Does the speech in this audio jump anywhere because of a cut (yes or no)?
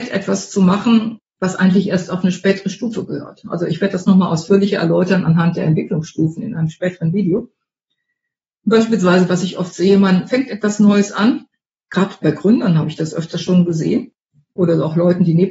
no